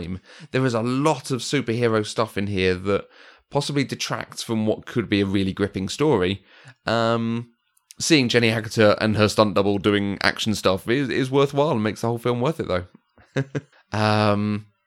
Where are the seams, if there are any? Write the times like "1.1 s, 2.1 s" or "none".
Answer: 13.7 s